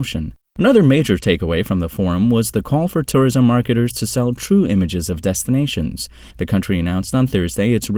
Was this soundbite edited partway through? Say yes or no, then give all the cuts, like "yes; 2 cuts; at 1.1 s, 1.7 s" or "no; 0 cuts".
yes; 1 cut; at 6.3 s